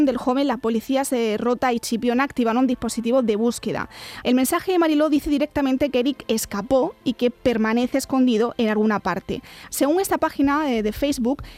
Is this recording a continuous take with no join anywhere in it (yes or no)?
no